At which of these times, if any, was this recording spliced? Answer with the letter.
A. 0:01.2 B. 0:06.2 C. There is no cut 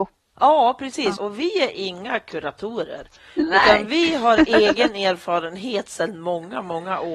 A